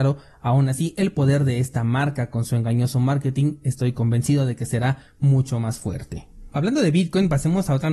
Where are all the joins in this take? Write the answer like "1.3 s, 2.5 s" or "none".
none